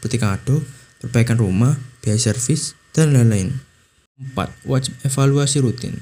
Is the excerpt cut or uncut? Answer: uncut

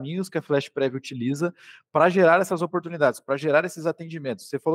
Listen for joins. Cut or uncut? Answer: uncut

